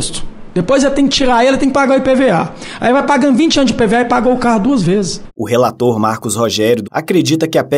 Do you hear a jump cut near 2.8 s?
no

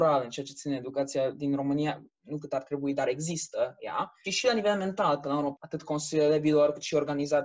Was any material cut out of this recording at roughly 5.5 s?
yes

